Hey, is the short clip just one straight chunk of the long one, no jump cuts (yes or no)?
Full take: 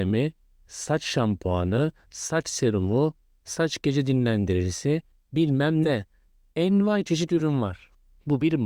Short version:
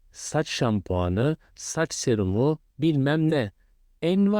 no